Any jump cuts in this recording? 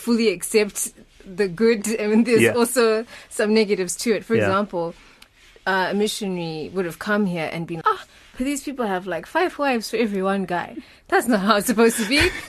yes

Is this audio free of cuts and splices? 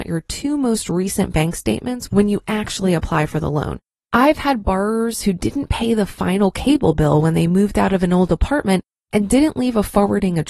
no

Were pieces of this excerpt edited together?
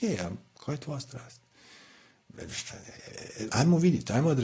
yes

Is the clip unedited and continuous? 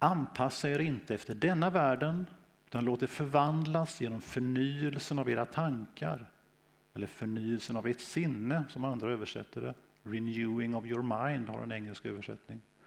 yes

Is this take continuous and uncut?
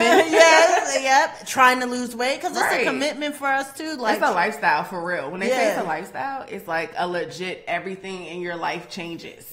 yes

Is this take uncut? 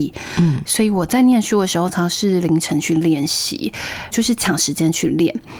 no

